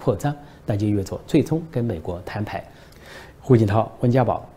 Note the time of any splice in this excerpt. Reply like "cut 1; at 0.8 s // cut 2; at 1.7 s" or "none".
cut 1; at 3.4 s